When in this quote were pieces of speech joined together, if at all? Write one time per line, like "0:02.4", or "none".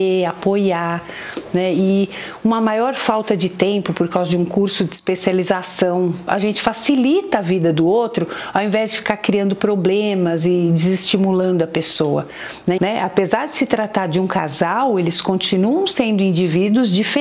0:06.3
0:12.8